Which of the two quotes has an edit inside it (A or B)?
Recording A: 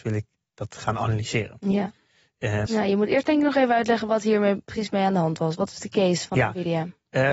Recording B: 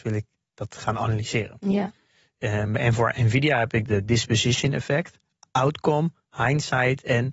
A